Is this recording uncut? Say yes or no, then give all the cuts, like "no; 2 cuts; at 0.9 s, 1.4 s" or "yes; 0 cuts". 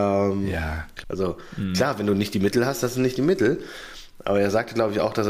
no; 1 cut; at 1.0 s